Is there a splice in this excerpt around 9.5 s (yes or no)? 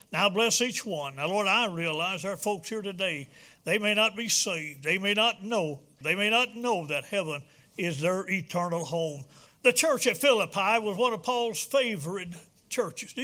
yes